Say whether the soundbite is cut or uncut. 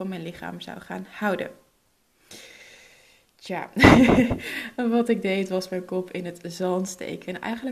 uncut